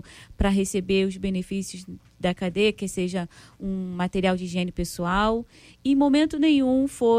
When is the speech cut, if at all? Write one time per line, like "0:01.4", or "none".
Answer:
none